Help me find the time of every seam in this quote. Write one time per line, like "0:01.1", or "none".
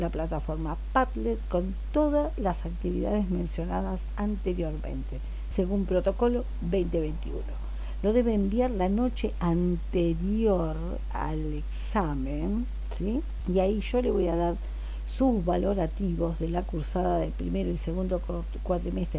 0:05.5
0:13.4